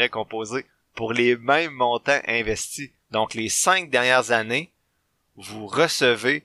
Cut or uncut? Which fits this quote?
cut